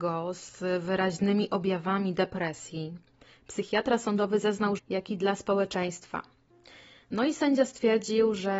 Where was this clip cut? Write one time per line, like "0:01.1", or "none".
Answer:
0:04.8